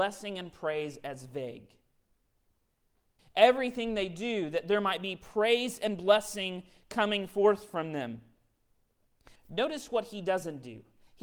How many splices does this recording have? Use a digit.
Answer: 2